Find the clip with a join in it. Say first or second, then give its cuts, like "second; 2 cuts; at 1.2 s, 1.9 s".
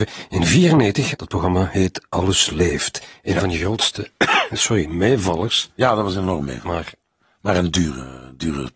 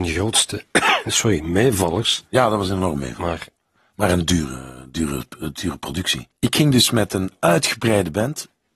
first; 1 cut; at 1.1 s